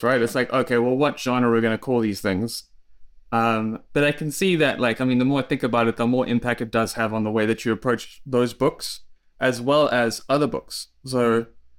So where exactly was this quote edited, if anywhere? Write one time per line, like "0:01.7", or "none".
none